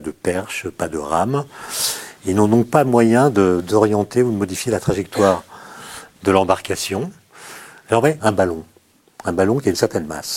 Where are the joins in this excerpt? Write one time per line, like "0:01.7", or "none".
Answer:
0:08.2